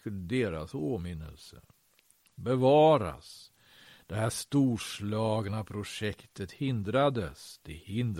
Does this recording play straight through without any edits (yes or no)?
yes